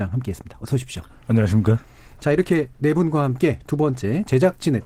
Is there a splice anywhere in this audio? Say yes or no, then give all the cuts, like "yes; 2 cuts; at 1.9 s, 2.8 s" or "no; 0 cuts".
no; 0 cuts